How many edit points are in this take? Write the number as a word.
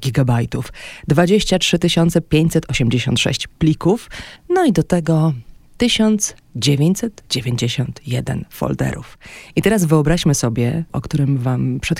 two